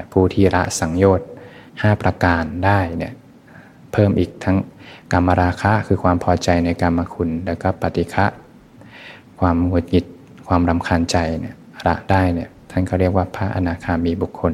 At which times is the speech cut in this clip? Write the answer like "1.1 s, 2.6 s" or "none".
1.7 s